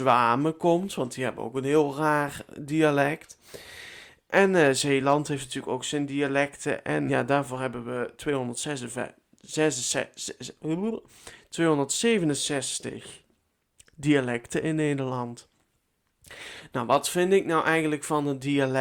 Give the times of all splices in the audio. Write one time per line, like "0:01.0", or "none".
0:04.3
0:07.1

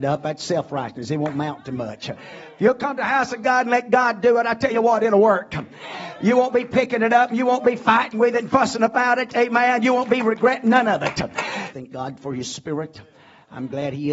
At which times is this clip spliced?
0:11.7

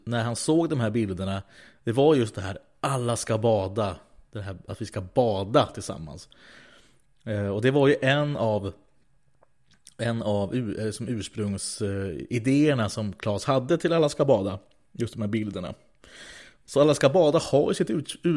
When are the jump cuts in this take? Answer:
none

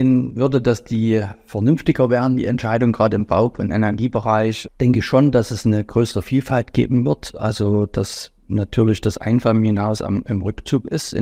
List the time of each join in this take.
0:04.7

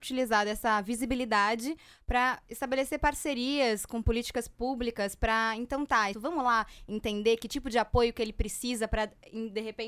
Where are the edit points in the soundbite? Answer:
0:06.1

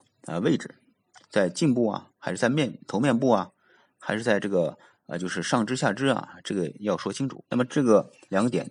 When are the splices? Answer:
0:07.4

